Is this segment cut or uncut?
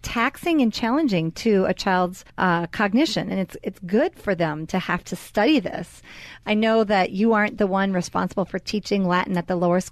cut